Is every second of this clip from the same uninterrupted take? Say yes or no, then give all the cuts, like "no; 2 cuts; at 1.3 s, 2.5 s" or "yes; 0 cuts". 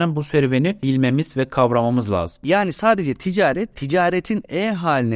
no; 1 cut; at 2.4 s